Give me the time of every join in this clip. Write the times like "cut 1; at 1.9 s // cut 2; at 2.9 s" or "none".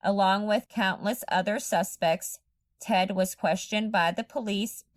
none